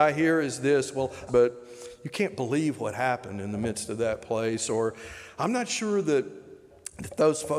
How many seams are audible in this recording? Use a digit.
1